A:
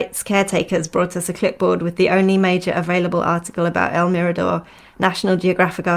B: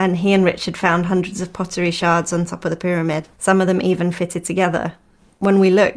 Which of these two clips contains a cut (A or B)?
B